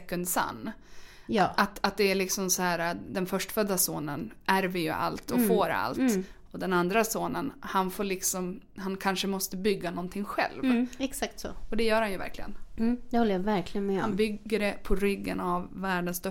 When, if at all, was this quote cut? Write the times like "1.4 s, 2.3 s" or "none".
none